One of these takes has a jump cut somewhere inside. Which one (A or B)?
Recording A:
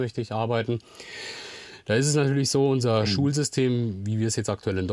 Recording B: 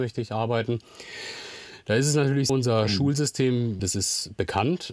B